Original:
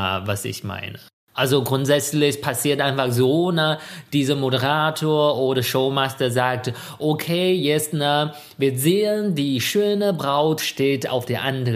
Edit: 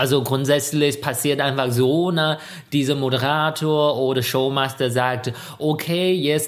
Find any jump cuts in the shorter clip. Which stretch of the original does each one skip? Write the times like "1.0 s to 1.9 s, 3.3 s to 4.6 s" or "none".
none